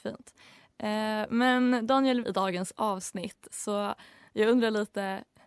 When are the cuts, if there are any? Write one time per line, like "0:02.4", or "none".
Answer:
0:02.2

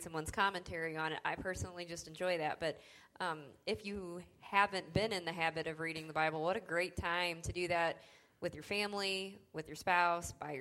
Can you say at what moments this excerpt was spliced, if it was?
none

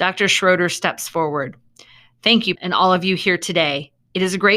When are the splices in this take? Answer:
0:02.5

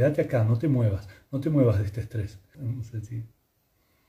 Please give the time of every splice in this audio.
0:02.5

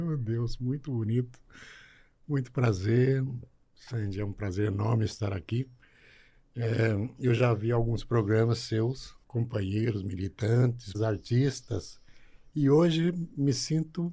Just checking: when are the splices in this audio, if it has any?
0:09.2
0:10.9

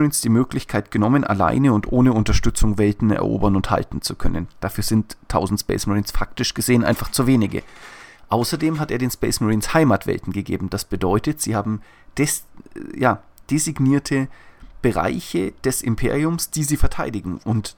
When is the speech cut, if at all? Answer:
none

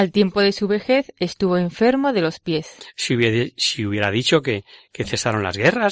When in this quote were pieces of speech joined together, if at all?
none

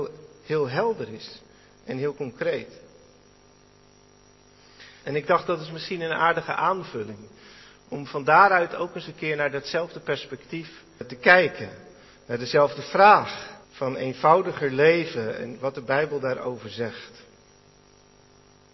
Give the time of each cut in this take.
0:05.0
0:11.0
0:13.6

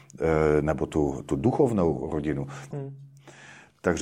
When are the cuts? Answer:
0:02.7

